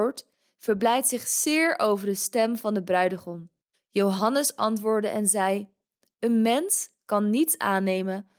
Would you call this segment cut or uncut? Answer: cut